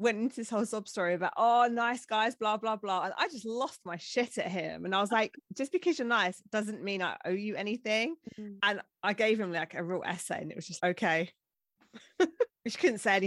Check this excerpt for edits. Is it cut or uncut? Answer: cut